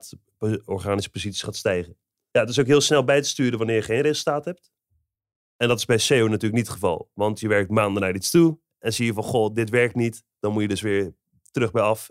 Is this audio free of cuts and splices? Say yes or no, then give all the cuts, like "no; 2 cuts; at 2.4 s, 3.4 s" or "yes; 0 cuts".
yes; 0 cuts